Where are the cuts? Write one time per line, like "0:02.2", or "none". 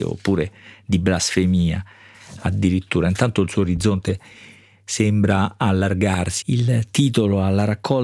0:06.4